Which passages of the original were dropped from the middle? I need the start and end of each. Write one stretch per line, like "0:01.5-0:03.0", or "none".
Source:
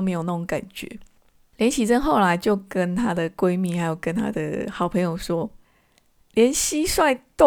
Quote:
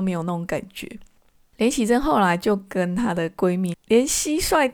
0:03.7-0:06.2